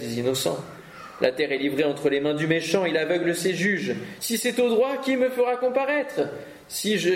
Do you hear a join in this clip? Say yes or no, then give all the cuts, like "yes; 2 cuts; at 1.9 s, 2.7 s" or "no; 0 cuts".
yes; 1 cut; at 4.2 s